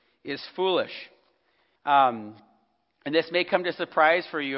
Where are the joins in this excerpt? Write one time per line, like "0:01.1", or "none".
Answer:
0:01.8